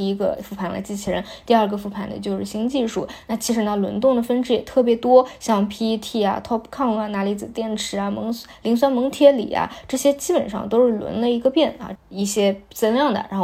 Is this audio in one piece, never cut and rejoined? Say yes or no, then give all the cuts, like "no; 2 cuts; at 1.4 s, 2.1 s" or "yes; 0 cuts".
no; 1 cut; at 12.0 s